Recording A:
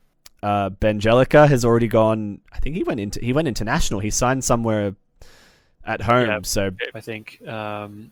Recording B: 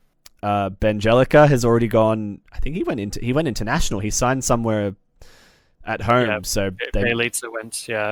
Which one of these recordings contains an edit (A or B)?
A